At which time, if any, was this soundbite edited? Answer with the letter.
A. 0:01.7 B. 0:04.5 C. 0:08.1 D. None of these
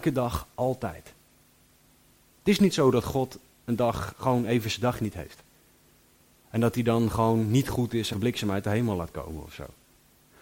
C